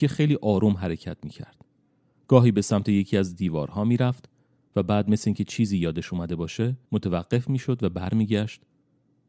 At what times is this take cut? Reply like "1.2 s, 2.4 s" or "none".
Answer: 6.8 s

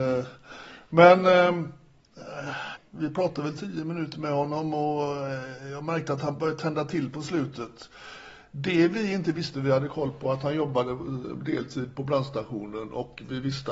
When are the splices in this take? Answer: 2.8 s, 9.5 s

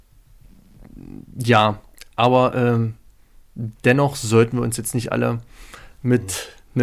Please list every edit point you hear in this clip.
none

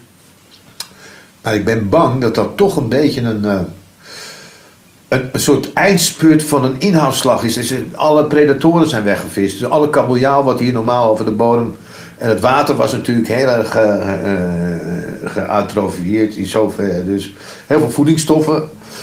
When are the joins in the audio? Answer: none

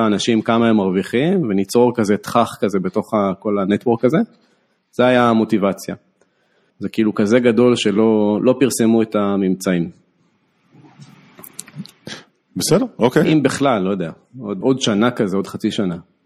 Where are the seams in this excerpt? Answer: 6.7 s, 13.2 s, 14.6 s

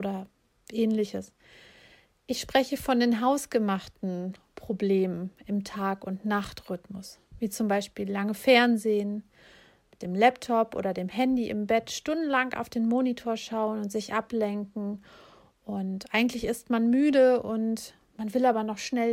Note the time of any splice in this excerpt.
none

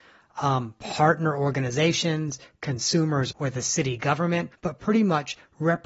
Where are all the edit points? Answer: 3.3 s, 4.5 s

